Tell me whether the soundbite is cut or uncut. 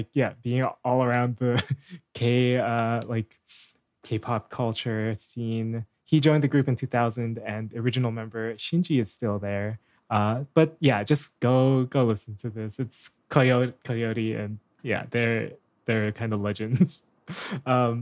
uncut